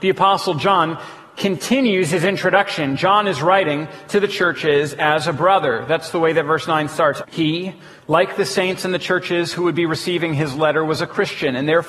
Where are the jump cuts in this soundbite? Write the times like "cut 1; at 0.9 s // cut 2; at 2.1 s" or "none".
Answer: cut 1; at 7.2 s